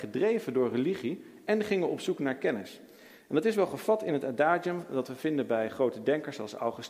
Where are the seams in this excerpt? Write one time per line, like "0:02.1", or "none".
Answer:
none